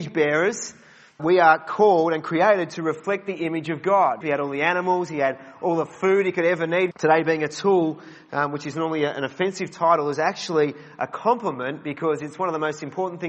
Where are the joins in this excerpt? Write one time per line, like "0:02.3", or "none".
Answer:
0:01.2
0:04.2
0:06.9